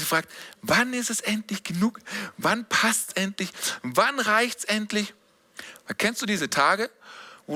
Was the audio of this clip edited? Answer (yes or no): no